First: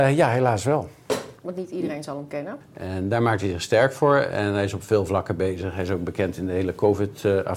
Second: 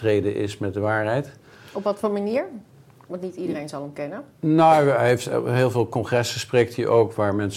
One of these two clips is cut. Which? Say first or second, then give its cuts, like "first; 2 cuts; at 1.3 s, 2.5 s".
first; 2 cuts; at 1.4 s, 2.6 s